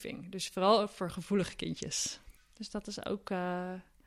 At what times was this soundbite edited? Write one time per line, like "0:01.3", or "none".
0:02.4

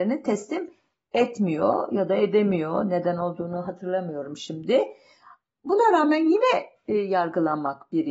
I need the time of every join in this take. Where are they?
none

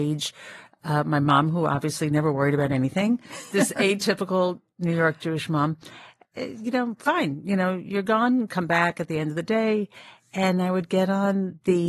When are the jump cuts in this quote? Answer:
0:03.5

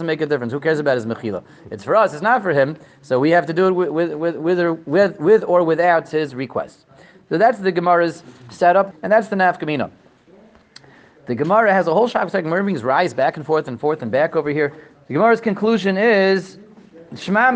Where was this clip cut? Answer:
0:08.9
0:15.0

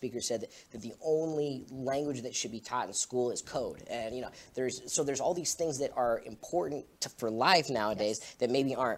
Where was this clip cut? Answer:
0:06.9

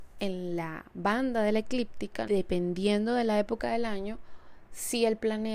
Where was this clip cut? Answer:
0:02.3

